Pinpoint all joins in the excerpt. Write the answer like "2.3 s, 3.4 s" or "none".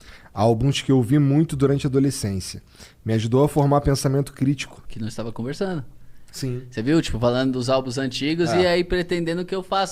4.9 s